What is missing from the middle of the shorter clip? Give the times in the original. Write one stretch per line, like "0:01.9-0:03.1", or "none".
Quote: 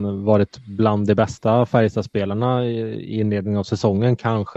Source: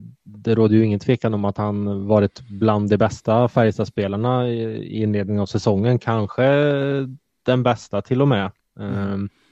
none